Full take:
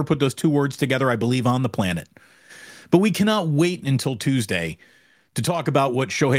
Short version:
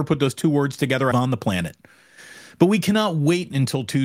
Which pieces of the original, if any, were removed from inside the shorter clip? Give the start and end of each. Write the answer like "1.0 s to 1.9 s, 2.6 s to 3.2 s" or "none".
1.1 s to 1.4 s